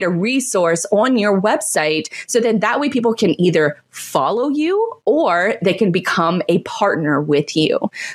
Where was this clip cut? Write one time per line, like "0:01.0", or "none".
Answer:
none